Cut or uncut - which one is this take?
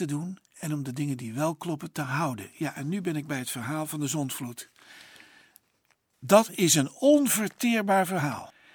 uncut